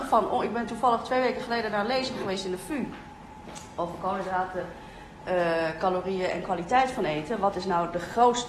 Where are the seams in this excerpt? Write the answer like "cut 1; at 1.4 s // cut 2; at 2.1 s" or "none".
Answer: none